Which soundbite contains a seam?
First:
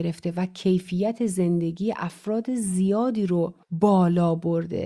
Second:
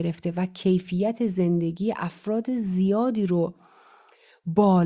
first; 1 cut; at 3.6 s

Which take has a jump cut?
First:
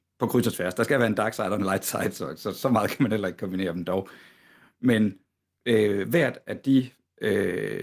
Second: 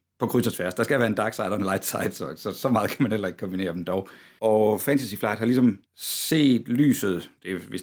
second; 2 cuts; at 4.4 s, 5.9 s

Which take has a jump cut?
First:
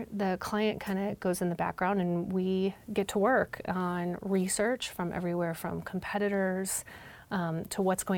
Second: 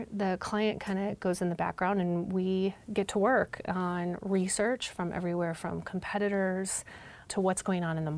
second; 1 cut; at 7.3 s

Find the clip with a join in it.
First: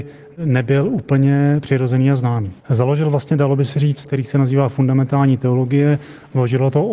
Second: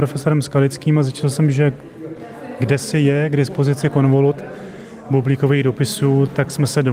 first; 2 cuts; at 2.6 s, 4.0 s

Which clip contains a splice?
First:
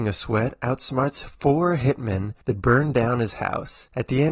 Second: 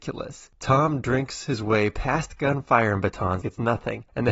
second; 1 cut; at 3.4 s

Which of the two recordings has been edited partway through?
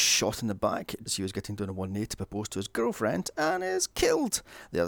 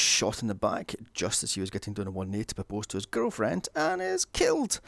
first; 1 cut; at 1.1 s

